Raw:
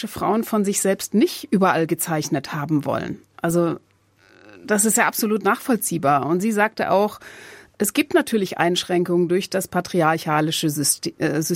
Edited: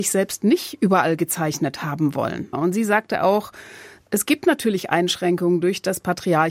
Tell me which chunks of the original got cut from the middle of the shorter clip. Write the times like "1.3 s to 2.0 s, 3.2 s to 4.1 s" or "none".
3.2 s to 6.2 s

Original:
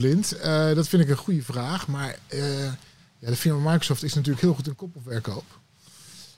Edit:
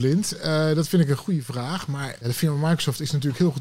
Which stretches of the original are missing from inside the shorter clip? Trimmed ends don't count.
2.2 s to 3.2 s

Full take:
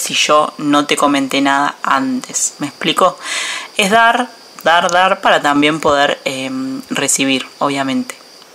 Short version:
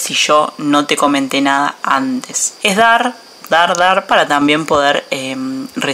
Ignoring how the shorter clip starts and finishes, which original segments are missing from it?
2.6 s to 3.7 s

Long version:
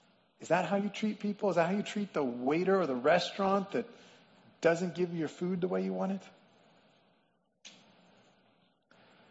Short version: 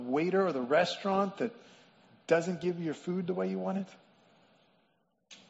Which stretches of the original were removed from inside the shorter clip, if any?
none

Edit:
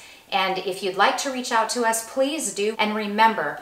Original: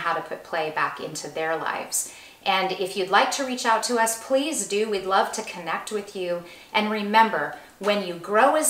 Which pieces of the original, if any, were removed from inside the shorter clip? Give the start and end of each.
4.9 s to 6.7 s

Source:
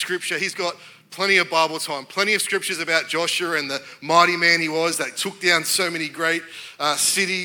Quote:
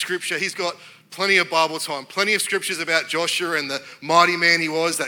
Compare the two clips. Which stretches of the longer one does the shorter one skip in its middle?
none

